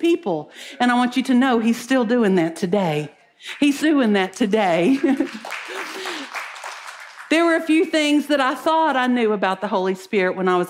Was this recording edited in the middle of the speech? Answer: yes; 1 cut; at 3.8 s

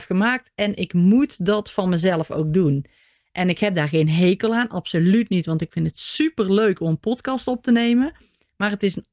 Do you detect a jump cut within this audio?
no; 0 cuts

